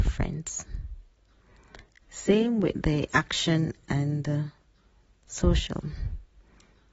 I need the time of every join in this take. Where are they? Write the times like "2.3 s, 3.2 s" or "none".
2.0 s

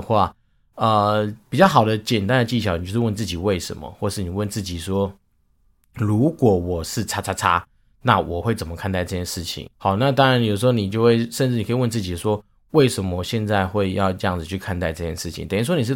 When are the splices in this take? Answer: 9.7 s

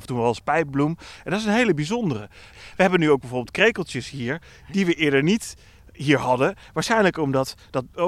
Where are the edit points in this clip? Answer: 2.5 s

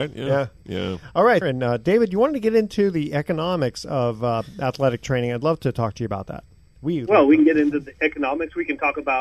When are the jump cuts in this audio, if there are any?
1.4 s

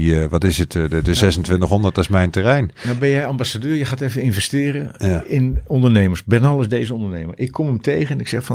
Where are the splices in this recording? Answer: none

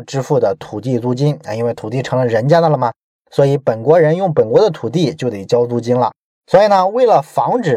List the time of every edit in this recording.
6.3 s

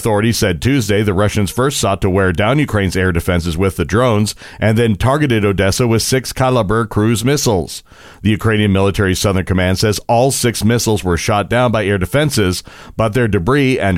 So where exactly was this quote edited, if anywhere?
none

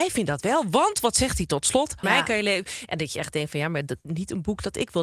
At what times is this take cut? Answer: 2.0 s

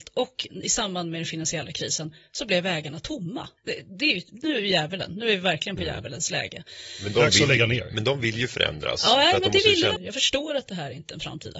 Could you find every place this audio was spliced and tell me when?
3.6 s, 10.0 s

